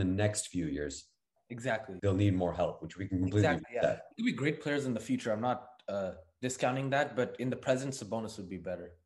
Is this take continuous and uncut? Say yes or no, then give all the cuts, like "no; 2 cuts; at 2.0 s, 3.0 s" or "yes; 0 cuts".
no; 1 cut; at 2.0 s